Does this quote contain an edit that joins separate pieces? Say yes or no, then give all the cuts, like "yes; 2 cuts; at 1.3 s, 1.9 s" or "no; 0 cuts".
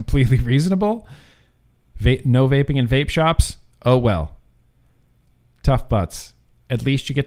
no; 0 cuts